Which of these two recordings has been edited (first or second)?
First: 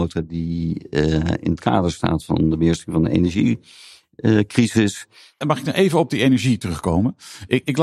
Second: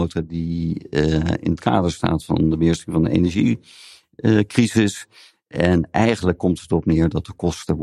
first